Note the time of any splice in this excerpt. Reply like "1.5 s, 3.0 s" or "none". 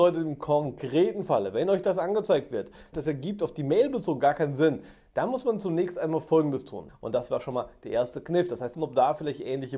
2.9 s, 6.9 s, 8.7 s